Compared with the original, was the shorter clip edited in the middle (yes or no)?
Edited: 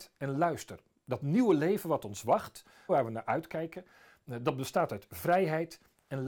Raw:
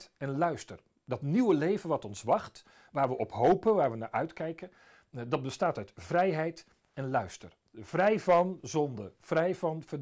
yes